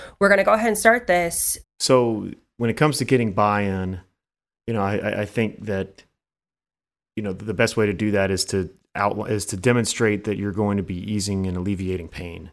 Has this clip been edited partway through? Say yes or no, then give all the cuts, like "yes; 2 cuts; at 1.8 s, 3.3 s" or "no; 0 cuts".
yes; 1 cut; at 1.6 s